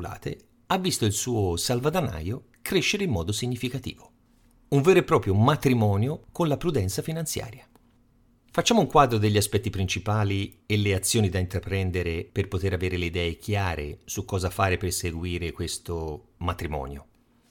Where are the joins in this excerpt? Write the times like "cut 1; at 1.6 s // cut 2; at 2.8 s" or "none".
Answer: none